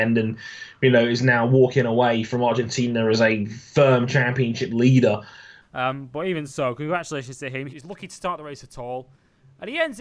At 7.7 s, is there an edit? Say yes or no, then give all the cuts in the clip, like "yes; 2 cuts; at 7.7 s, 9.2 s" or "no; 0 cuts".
yes; 2 cuts; at 5.6 s, 7.7 s